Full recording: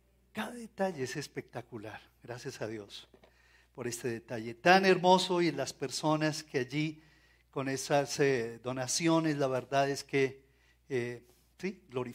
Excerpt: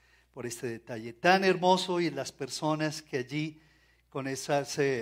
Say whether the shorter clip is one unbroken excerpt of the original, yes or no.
yes